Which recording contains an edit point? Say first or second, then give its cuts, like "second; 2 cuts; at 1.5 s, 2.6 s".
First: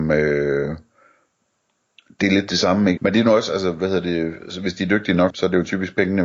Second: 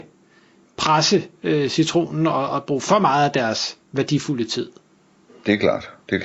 first; 2 cuts; at 3.0 s, 5.3 s